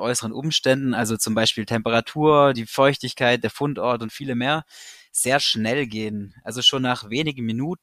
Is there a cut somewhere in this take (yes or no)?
no